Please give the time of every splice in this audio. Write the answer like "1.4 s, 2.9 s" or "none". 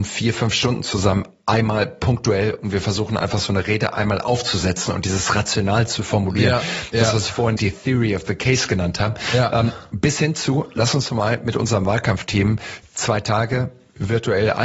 7.6 s